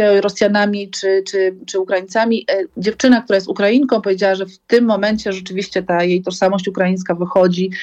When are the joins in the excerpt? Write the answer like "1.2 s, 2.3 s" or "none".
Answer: 2.7 s